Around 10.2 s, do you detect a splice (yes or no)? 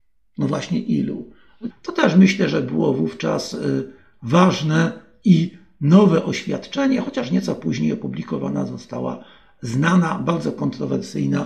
no